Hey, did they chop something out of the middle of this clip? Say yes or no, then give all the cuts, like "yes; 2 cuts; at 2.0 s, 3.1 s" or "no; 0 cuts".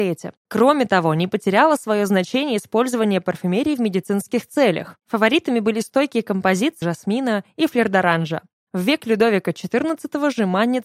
yes; 2 cuts; at 5.0 s, 6.8 s